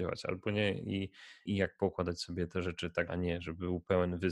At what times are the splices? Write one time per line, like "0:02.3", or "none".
0:01.5
0:03.1